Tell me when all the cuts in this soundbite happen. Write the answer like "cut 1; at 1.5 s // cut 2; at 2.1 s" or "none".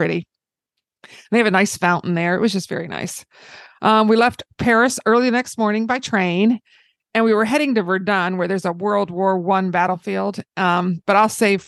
none

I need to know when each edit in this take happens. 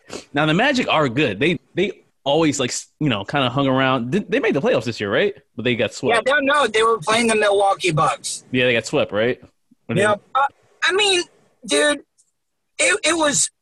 cut 1; at 1.6 s // cut 2; at 6.7 s

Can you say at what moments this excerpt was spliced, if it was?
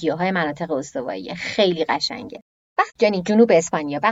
cut 1; at 2.9 s

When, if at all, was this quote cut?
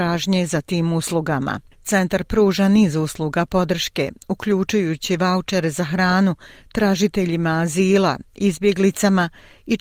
none

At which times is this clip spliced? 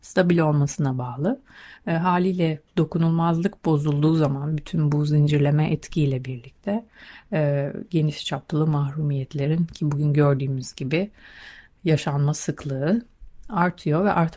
none

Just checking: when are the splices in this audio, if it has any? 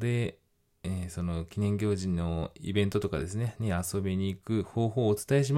none

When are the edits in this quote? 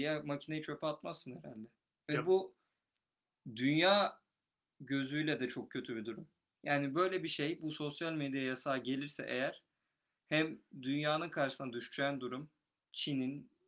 none

